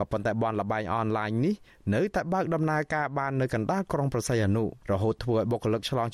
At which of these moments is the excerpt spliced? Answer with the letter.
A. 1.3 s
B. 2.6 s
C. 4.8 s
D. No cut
C